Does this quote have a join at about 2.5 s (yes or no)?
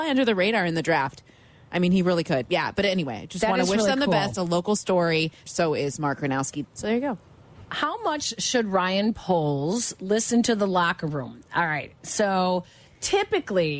yes